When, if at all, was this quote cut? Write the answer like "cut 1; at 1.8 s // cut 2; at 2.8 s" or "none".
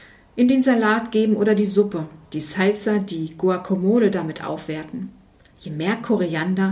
cut 1; at 2.2 s